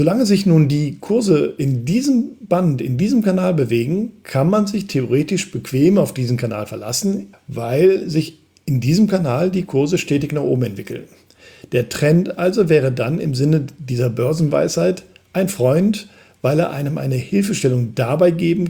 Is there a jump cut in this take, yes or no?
yes